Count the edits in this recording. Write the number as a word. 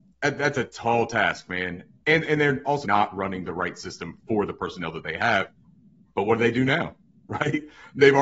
one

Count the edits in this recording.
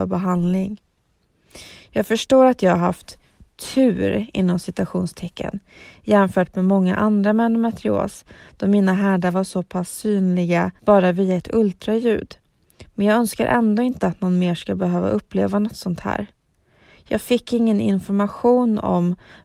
one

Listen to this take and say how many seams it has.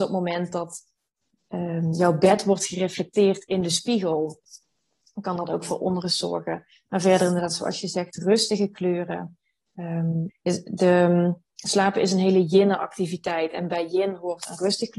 one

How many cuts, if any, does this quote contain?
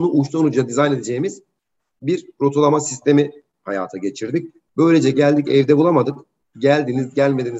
zero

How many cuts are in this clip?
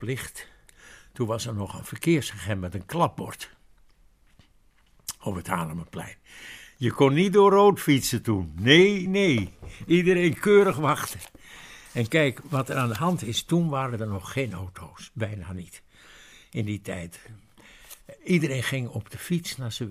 one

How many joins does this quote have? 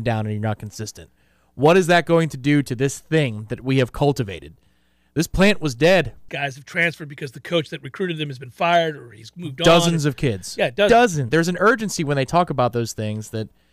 two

